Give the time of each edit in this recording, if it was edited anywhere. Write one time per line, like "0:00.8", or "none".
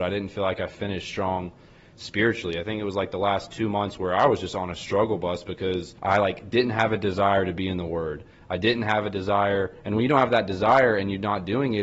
0:06.0